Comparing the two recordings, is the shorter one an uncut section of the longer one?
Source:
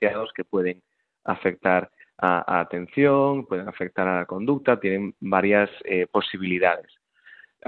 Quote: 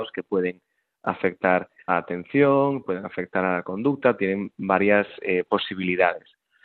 no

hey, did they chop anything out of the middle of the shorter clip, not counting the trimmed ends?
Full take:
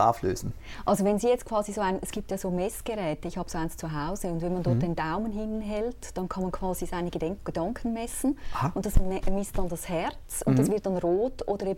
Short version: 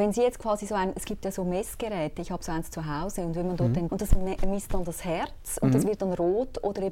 yes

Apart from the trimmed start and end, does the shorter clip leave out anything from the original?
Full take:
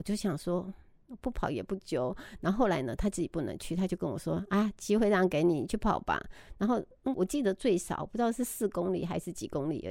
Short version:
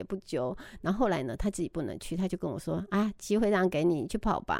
no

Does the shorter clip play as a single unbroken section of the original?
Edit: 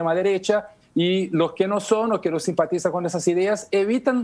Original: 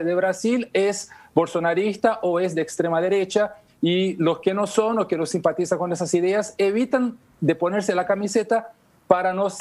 yes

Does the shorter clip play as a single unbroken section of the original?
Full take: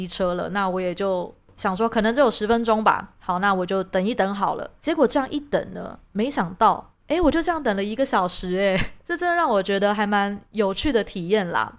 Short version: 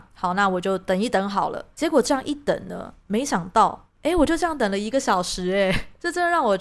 yes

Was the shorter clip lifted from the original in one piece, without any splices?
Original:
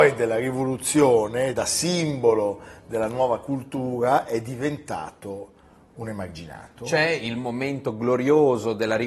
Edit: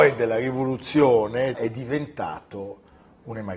no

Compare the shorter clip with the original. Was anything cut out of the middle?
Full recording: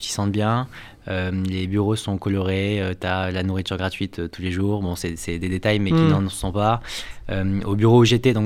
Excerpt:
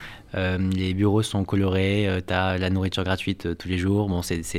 no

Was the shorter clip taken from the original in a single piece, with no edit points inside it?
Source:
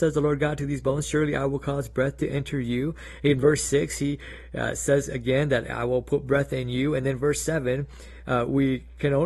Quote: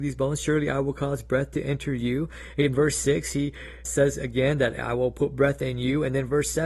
no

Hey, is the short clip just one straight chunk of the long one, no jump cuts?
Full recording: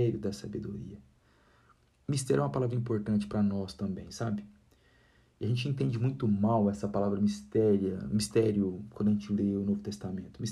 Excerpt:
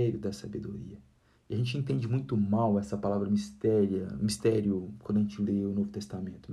no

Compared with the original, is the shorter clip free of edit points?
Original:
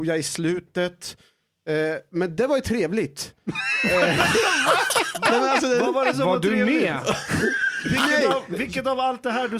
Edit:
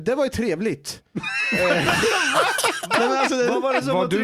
yes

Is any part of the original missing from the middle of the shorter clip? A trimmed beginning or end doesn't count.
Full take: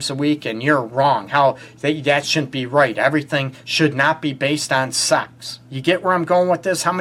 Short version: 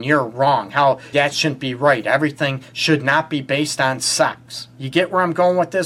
yes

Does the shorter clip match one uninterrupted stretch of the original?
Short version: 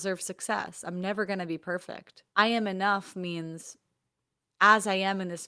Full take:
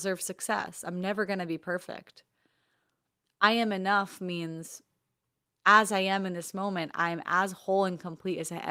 no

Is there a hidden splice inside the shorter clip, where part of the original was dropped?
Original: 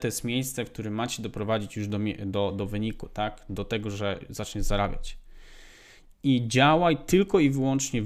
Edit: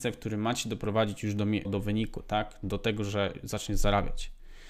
yes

